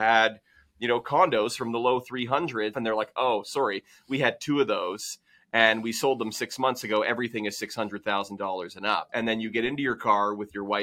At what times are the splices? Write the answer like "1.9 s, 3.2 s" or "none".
2.7 s, 9.1 s